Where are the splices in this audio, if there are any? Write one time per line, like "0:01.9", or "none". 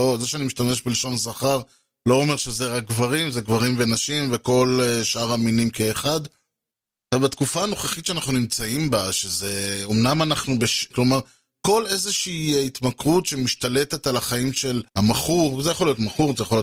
0:10.9
0:14.9